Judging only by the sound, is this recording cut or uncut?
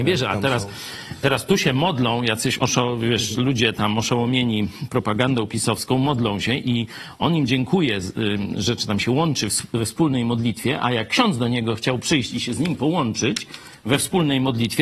cut